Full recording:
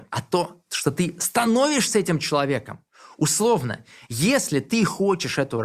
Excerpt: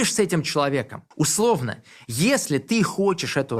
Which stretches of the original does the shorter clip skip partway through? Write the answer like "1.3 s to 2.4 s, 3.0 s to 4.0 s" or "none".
2.9 s to 3.1 s